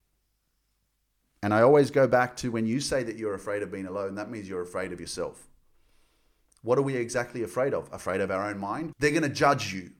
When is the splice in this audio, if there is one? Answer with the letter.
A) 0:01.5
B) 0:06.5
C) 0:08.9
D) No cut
C